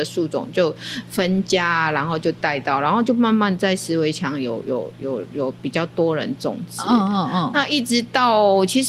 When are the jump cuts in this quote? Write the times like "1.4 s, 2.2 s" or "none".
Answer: none